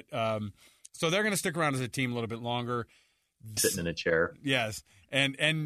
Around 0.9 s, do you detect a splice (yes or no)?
no